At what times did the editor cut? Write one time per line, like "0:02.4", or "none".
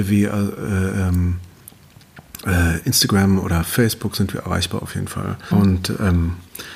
0:05.5